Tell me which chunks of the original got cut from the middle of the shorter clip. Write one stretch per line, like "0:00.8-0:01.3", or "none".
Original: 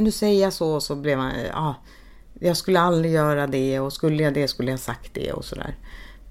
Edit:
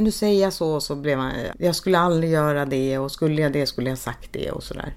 0:01.5-0:02.3